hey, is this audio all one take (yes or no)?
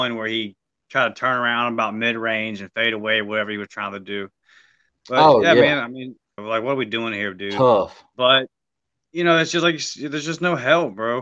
no